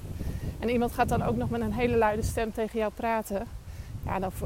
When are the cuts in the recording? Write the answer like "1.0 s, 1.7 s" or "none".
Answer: none